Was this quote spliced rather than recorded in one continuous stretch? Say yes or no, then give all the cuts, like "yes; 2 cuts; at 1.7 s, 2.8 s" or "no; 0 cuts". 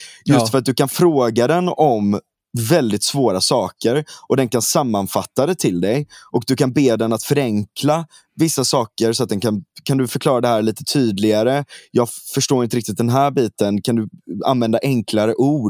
no; 0 cuts